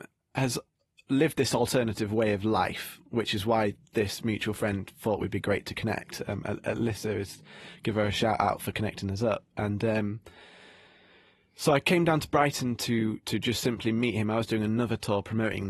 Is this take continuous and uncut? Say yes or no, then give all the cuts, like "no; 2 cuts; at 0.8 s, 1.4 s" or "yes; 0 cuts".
yes; 0 cuts